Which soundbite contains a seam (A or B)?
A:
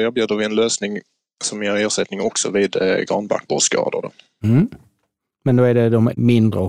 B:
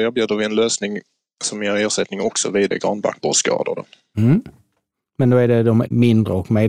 B